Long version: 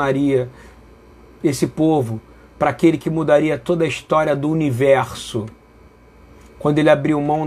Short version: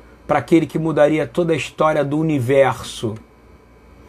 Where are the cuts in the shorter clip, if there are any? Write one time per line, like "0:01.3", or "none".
none

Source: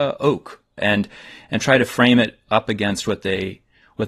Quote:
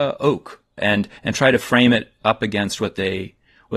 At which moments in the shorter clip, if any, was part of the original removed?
0:01.2

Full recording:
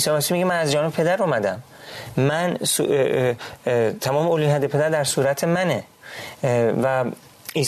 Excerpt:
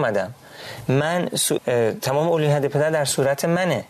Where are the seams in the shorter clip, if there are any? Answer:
0:01.6

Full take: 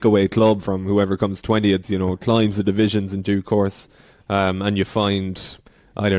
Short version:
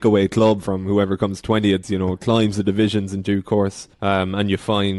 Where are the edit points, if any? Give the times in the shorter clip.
0:03.9

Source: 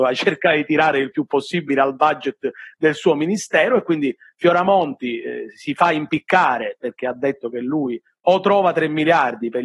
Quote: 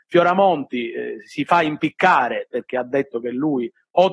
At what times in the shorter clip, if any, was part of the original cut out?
none

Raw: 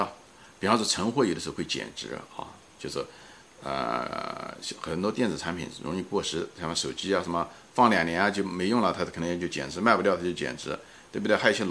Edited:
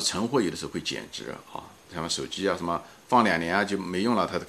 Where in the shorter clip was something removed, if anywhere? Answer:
0:01.9

